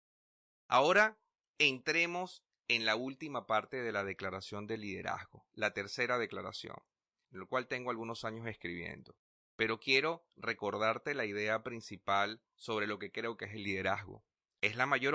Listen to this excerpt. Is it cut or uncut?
cut